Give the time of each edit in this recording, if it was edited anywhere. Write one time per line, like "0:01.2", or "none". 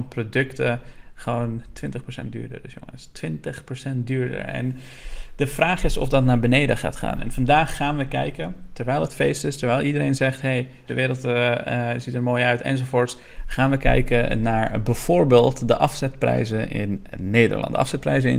0:07.2
0:10.9